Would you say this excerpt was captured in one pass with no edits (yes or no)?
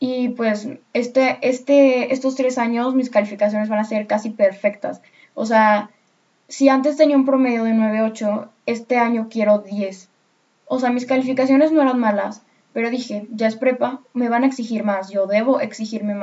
no